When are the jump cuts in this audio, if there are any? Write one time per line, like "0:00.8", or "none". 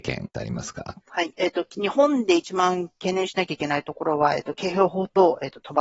none